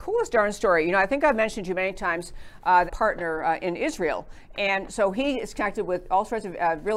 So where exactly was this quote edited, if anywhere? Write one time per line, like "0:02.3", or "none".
0:02.9

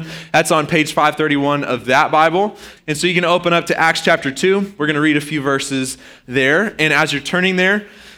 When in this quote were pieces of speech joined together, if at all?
0:02.8

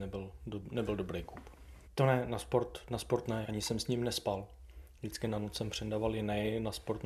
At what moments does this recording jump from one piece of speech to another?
0:01.8
0:03.4

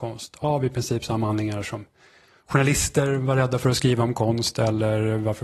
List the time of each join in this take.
none

